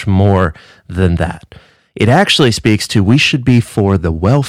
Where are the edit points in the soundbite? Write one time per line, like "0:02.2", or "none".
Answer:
none